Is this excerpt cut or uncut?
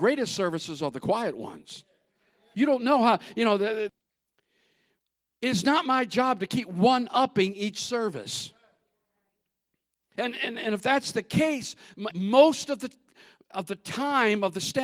cut